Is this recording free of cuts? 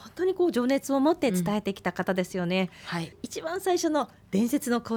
no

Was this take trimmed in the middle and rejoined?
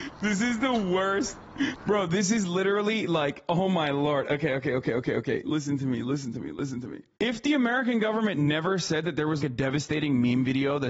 yes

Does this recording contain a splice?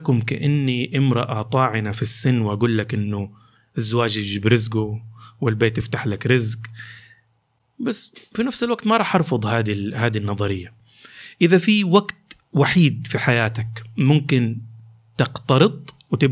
no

